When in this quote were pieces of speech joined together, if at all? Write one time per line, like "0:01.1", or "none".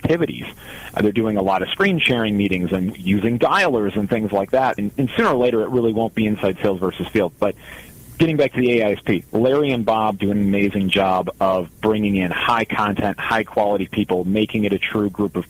0:04.8
0:10.3